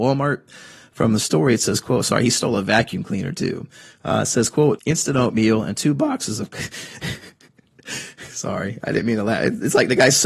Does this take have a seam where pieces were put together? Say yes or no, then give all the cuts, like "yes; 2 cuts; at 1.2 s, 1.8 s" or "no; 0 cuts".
yes; 1 cut; at 4.8 s